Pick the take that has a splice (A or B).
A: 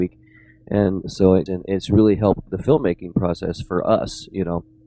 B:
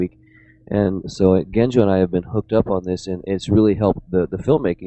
A